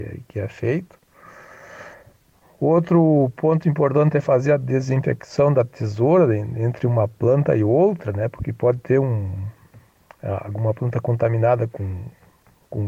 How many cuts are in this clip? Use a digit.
0